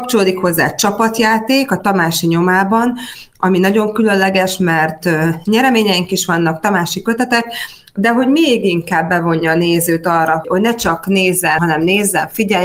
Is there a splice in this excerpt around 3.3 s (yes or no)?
no